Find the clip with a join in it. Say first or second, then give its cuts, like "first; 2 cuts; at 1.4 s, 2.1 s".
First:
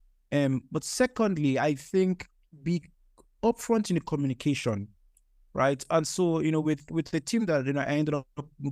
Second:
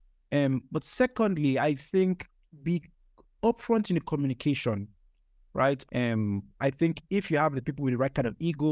second; 1 cut; at 5.9 s